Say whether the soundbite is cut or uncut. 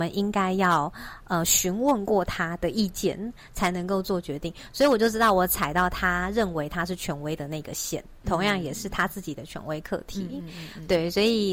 uncut